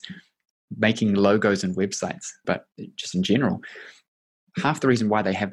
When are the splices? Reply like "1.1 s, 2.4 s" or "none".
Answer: 2.4 s

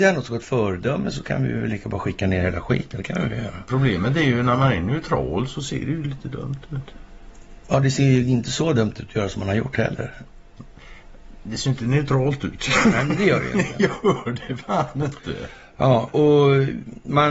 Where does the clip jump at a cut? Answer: 16.1 s

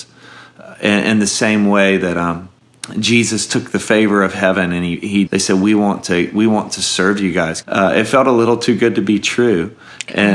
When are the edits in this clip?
5.3 s, 7.6 s

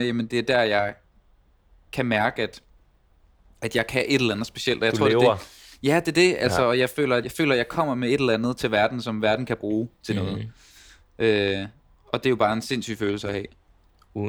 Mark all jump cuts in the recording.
7.2 s

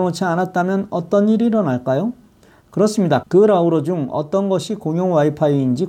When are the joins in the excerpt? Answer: 3.2 s

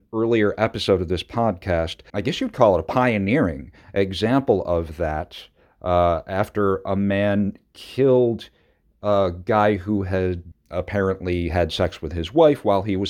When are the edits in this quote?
2.1 s, 10.5 s

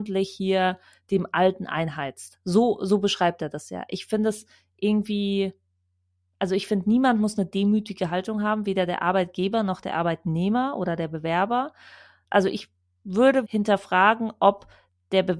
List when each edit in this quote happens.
12.2 s, 13.4 s

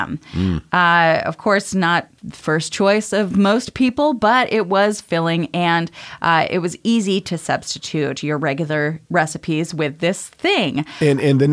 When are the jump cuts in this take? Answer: none

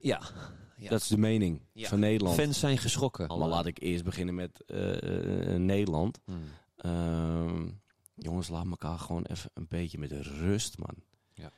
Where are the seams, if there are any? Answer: 3.3 s

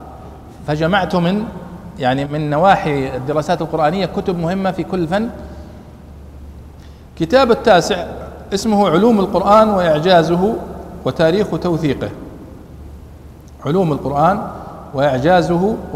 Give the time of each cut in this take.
2.2 s

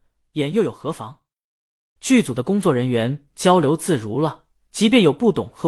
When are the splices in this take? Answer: 2.0 s

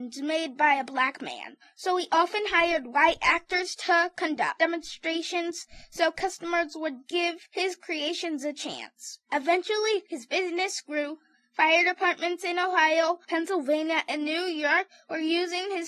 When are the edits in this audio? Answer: none

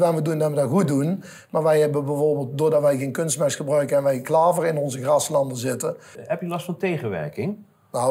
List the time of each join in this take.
6.1 s

